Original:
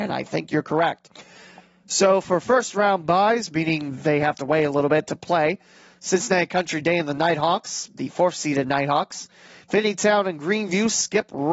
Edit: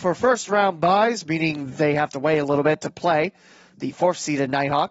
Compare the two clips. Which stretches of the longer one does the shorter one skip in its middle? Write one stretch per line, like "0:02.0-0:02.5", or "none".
0:06.0-0:07.9